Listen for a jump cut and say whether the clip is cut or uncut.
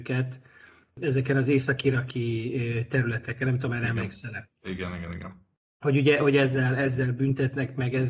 uncut